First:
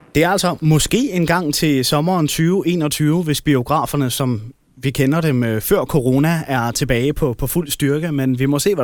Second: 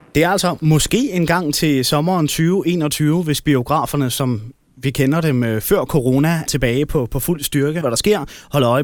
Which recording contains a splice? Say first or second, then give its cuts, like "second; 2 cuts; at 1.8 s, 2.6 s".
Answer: second; 2 cuts; at 6.5 s, 7.8 s